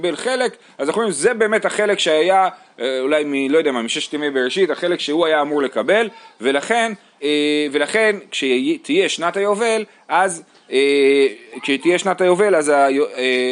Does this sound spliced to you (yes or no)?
yes